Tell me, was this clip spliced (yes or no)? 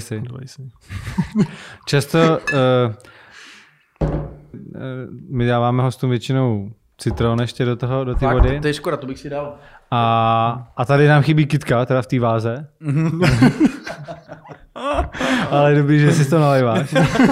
yes